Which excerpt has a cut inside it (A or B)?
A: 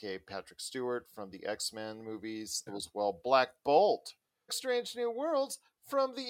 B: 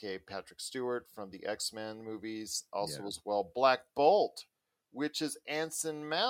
A